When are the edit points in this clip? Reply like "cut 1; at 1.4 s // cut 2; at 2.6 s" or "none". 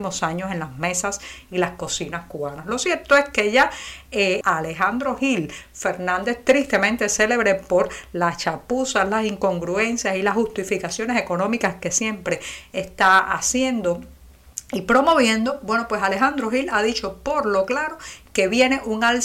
cut 1; at 4.4 s